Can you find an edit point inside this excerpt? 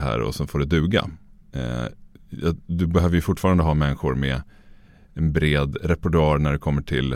no; 0 cuts

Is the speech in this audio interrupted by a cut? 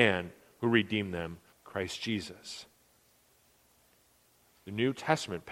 yes; 1 cut; at 1.5 s

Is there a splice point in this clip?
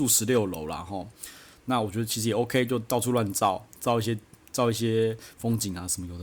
no; 0 cuts

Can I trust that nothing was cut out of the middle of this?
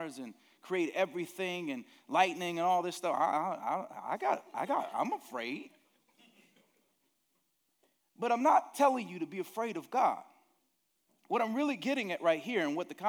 yes; 0 cuts

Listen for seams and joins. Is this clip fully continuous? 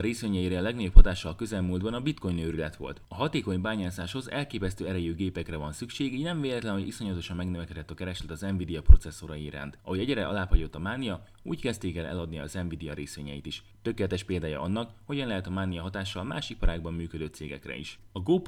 yes; 0 cuts

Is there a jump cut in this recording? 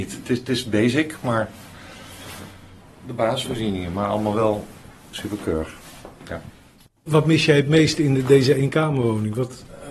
yes; 1 cut; at 7.0 s

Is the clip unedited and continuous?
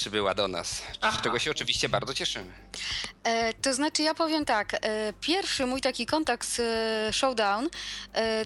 yes; 0 cuts

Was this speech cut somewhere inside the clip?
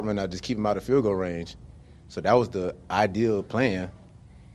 no; 0 cuts

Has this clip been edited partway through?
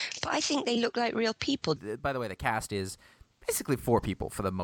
yes; 1 cut; at 1.8 s

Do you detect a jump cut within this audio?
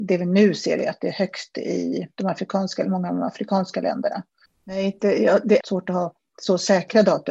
yes; 2 cuts; at 4.5 s, 5.6 s

